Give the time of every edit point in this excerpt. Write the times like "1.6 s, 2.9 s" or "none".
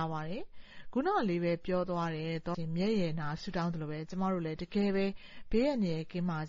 2.5 s

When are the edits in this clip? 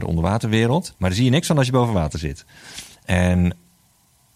1.0 s, 3.0 s

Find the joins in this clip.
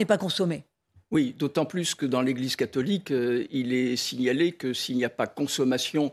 none

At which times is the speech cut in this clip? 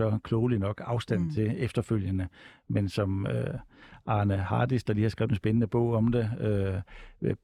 none

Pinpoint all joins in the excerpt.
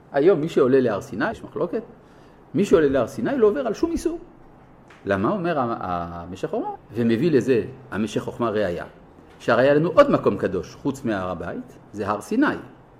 1.3 s, 6.8 s

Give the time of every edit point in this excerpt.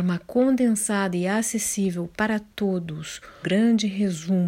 3.4 s

